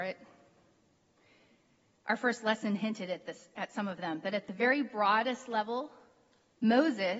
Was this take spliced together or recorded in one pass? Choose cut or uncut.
uncut